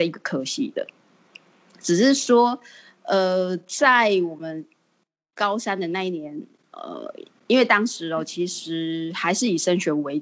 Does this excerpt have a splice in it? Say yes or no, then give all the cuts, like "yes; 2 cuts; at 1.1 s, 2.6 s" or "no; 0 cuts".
no; 0 cuts